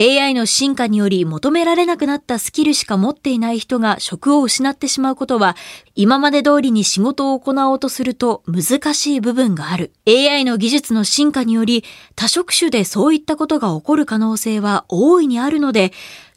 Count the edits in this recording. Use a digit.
2